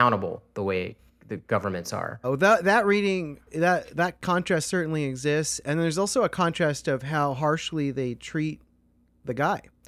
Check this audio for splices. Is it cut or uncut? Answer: cut